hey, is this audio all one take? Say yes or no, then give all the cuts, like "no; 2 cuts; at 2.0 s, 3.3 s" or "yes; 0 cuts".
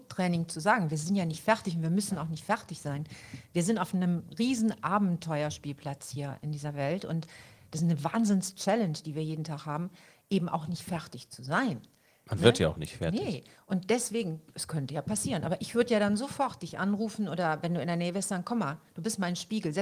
yes; 0 cuts